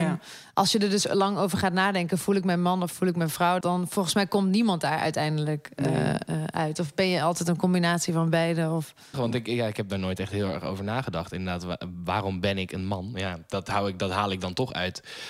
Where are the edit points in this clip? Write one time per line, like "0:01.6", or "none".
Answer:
0:03.6
0:09.1